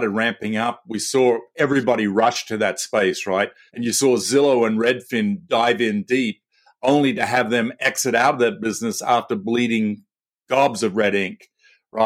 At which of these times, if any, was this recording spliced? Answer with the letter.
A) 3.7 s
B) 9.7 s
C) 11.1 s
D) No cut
A